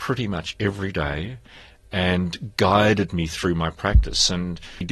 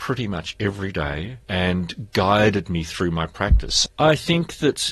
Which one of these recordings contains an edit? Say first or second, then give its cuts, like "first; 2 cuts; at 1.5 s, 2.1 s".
second; 2 cuts; at 1.4 s, 3.9 s